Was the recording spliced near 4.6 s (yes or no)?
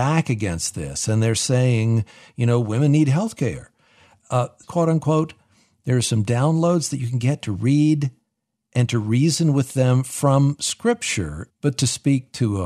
yes